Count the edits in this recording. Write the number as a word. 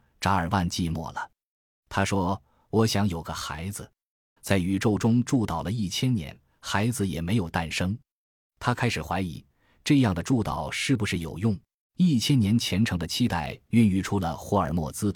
two